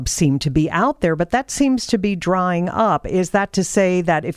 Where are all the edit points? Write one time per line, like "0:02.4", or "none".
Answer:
none